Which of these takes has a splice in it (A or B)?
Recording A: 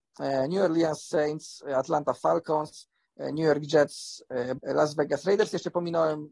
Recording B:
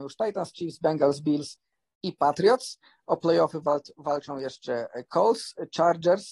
A